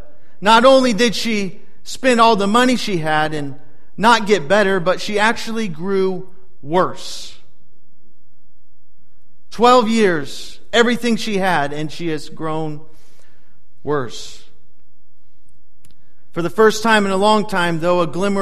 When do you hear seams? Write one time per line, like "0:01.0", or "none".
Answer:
none